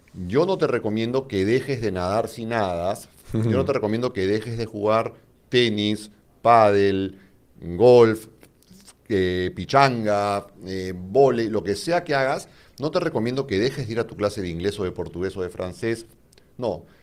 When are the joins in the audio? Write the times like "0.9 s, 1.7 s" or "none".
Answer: none